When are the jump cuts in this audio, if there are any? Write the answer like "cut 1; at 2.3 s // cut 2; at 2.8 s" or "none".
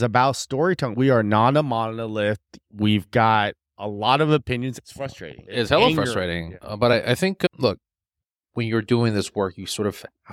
cut 1; at 0.9 s